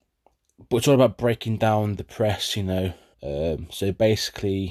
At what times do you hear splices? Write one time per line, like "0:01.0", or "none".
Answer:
0:03.1